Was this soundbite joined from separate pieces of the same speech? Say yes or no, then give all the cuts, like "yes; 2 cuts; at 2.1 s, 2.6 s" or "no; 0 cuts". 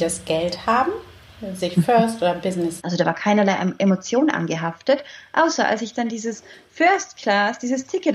yes; 1 cut; at 2.8 s